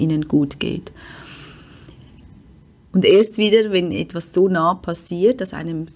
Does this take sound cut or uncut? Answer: uncut